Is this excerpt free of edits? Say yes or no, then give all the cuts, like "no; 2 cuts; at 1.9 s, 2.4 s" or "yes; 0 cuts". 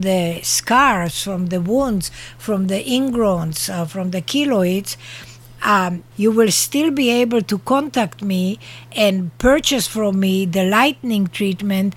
no; 1 cut; at 6.1 s